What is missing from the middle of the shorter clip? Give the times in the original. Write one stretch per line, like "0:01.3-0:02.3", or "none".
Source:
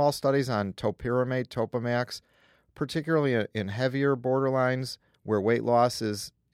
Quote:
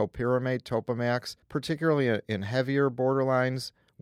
0:02.3-0:02.7